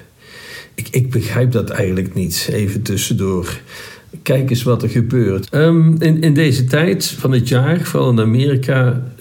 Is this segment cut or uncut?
cut